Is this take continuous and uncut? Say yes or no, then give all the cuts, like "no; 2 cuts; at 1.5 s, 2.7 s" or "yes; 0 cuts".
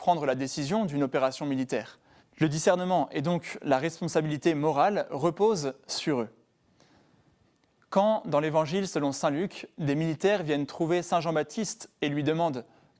no; 1 cut; at 2.2 s